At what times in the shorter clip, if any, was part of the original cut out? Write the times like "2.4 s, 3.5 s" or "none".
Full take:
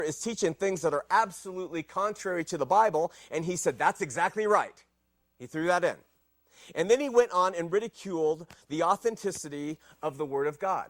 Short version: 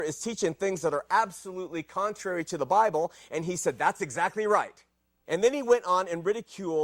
5.3 s

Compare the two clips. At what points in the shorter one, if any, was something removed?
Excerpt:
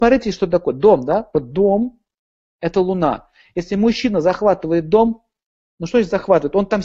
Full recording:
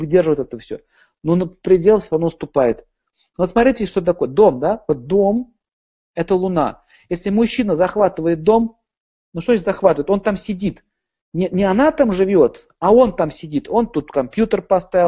none

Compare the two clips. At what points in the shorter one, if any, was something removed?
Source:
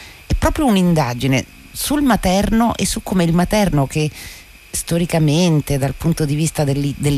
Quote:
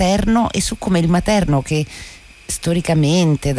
none

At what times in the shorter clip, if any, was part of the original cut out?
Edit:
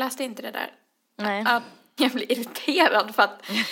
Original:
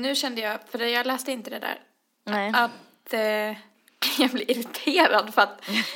2.0 s

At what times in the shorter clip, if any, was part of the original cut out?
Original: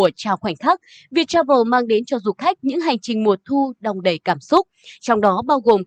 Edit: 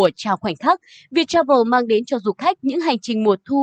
none

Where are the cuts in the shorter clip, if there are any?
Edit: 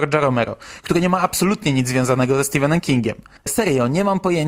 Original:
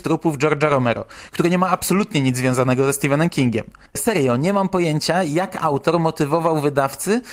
none

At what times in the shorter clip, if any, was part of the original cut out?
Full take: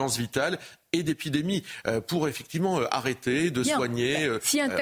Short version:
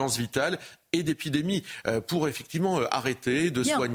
none

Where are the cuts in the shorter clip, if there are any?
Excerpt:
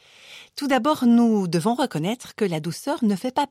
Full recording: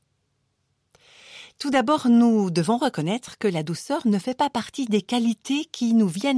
none

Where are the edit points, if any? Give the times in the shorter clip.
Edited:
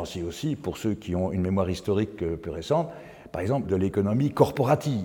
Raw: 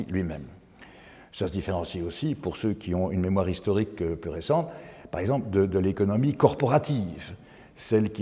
3.6 s

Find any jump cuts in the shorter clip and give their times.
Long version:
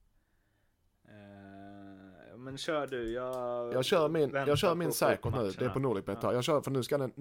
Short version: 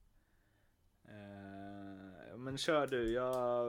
none

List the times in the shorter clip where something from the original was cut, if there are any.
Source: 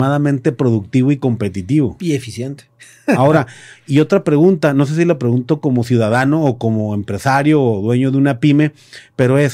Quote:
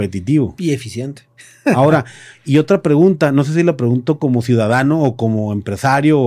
none

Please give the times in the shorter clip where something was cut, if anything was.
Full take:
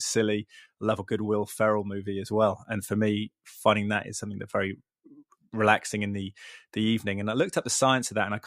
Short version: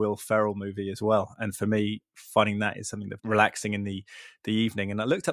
3.2 s

